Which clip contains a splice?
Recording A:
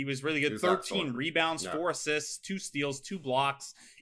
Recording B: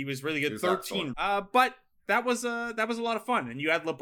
B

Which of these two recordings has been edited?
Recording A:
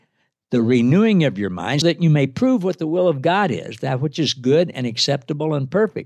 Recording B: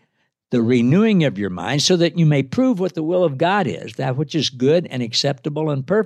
A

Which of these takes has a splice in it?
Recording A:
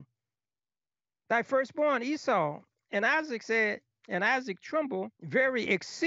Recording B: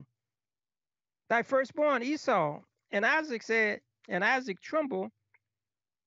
A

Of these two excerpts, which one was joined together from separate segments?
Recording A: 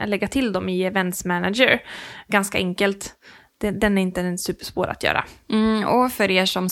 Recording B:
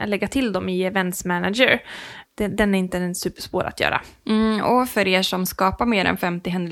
B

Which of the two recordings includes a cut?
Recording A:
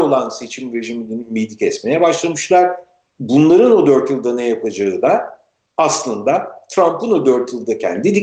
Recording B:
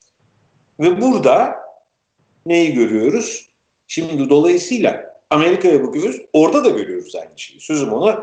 B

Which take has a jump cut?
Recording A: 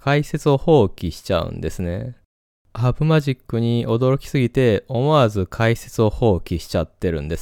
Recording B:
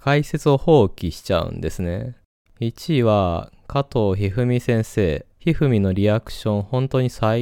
B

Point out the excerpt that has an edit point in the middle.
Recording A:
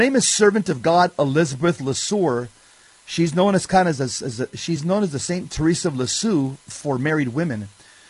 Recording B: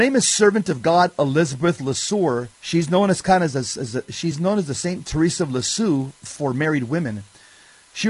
B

